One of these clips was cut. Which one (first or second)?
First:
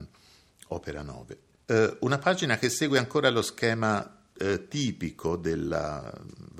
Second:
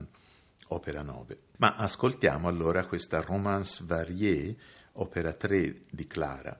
first